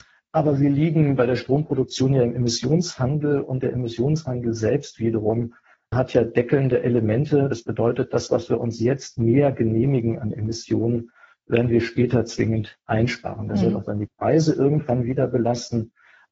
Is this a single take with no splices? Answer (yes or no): yes